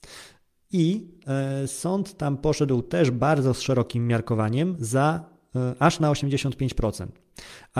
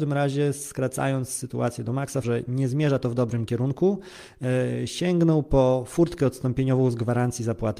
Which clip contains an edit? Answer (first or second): second